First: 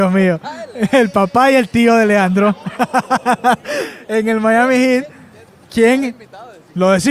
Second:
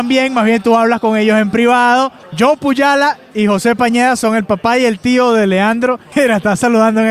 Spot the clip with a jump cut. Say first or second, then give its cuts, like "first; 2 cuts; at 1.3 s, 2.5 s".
second; 2 cuts; at 2.2 s, 6.1 s